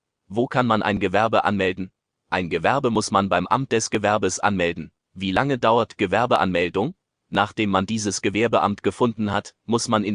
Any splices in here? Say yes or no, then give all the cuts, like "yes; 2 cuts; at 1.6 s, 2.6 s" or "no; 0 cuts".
yes; 1 cut; at 5.0 s